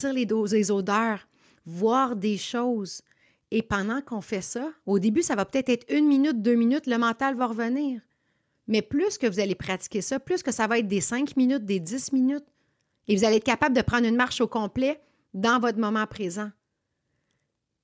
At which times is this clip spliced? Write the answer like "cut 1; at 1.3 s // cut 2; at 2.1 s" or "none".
none